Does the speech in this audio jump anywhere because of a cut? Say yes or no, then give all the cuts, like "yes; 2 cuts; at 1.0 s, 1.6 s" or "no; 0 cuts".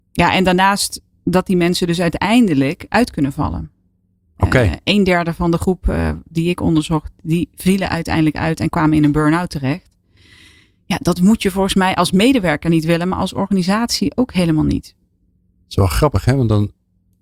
no; 0 cuts